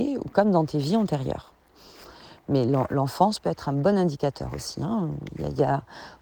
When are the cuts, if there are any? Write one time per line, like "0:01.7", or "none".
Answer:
none